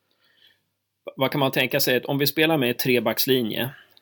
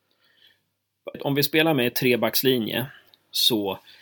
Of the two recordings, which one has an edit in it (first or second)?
second